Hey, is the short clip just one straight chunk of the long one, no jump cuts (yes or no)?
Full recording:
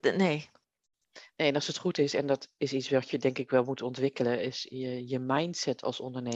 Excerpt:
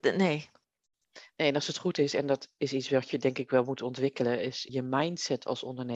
no